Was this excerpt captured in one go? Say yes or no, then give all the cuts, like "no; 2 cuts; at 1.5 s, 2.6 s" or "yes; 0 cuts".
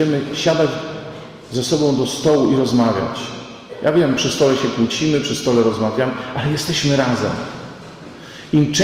yes; 0 cuts